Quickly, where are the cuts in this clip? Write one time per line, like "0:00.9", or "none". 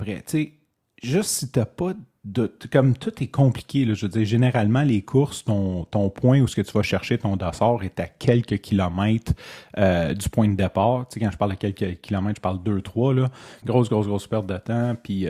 0:13.6